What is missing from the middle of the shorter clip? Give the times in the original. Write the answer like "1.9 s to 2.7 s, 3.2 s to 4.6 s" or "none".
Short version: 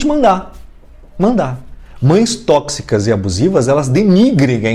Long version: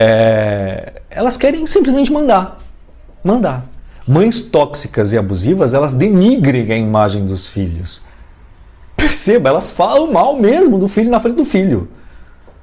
none